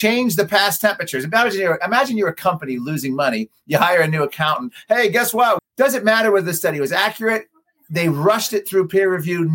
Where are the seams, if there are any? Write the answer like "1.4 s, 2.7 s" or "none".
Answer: 5.6 s